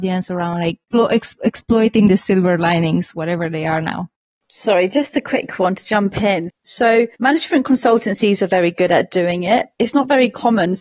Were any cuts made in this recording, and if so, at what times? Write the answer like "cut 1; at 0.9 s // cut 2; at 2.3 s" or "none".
cut 1; at 6.5 s // cut 2; at 9.7 s